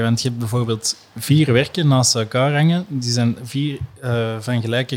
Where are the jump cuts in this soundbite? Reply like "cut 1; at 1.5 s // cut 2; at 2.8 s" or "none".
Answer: none